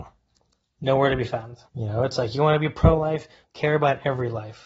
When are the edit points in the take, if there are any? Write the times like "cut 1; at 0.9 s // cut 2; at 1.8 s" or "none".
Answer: cut 1; at 1.7 s // cut 2; at 3.4 s